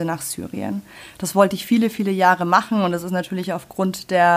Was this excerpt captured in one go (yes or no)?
yes